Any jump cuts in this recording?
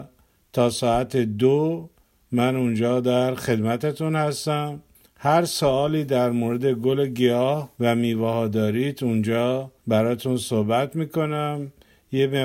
yes; 2 cuts; at 7.7 s, 9.8 s

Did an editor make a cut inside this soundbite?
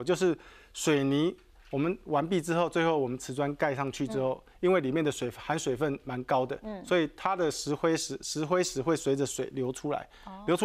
no; 0 cuts

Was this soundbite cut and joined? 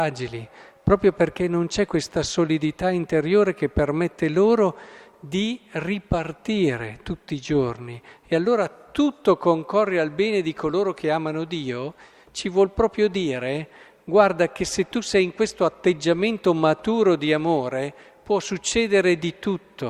no; 0 cuts

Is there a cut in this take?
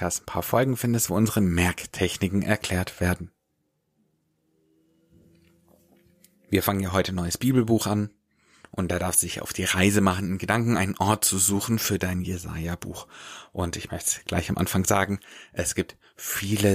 no; 0 cuts

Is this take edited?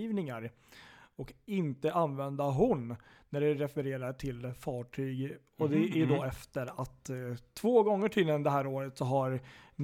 no; 0 cuts

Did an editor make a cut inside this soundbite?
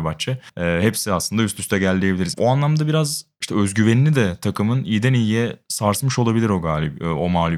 yes; 1 cut; at 2.3 s

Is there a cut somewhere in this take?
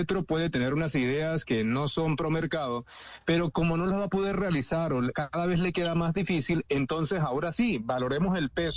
no; 0 cuts

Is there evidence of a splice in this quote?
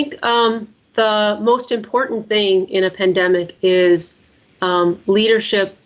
no; 0 cuts

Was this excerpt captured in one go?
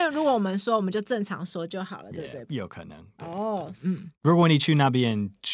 no; 2 cuts; at 2.5 s, 3.7 s

